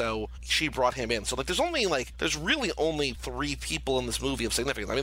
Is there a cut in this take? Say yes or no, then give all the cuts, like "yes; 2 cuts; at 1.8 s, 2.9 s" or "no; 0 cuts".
no; 0 cuts